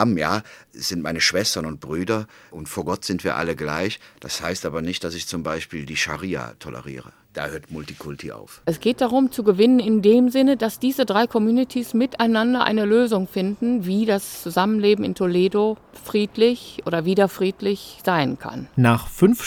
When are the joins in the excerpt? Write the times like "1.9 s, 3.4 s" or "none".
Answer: 8.6 s